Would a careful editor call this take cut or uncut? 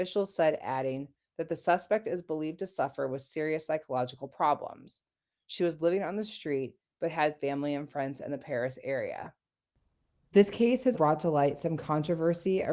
cut